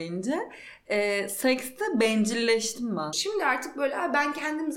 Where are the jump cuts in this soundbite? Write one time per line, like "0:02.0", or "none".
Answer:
0:03.1